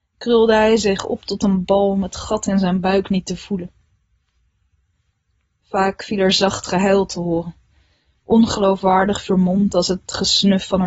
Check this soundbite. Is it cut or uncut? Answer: uncut